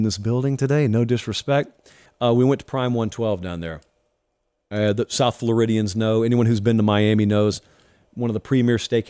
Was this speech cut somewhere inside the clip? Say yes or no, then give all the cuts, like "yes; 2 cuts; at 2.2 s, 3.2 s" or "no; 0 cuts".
yes; 1 cut; at 2.1 s